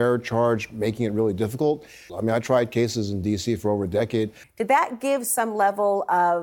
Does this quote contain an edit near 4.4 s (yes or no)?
yes